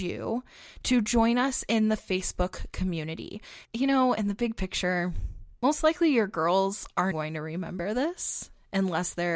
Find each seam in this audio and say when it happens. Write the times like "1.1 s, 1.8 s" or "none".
3.6 s, 7.1 s